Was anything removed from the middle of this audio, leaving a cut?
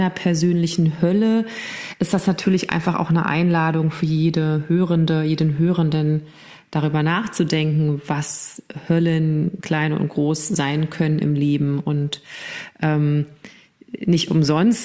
no; 0 cuts

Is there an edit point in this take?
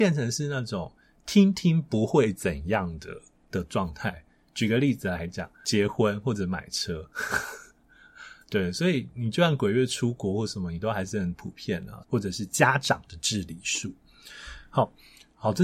yes; 1 cut; at 12.0 s

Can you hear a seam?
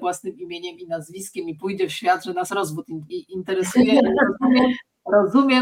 yes; 1 cut; at 3.1 s

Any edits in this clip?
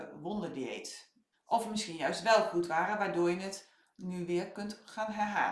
yes; 1 cut; at 1.3 s

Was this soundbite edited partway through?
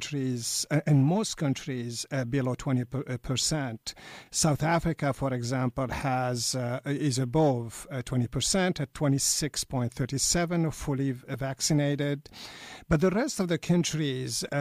no; 0 cuts

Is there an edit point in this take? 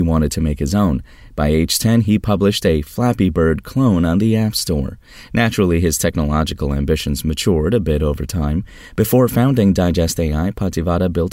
no; 0 cuts

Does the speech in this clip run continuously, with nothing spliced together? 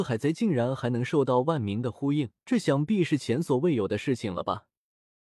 no; 1 cut; at 2.4 s

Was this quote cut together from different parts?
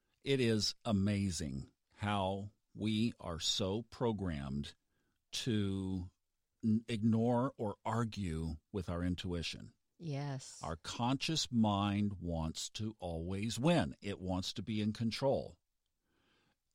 no; 0 cuts

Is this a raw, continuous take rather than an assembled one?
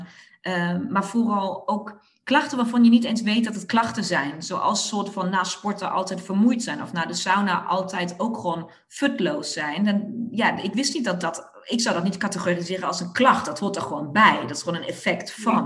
yes; 0 cuts

